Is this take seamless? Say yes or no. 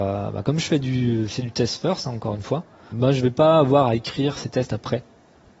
no